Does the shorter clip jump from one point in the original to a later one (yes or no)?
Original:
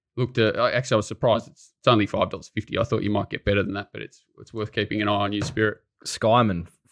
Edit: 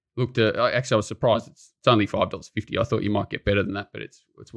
no